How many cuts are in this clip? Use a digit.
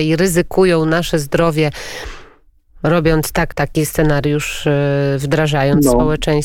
1